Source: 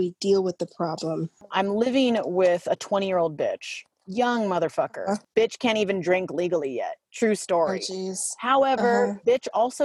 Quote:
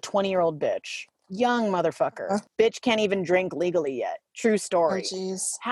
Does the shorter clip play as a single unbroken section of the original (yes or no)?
yes